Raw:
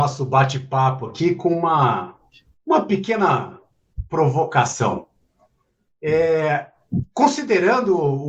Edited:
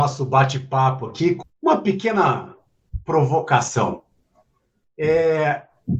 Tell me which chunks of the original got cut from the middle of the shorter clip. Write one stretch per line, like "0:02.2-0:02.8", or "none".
0:01.4-0:02.5